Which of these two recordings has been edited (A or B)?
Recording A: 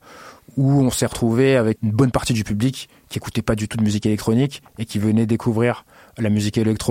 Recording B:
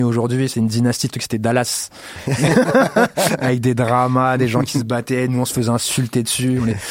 A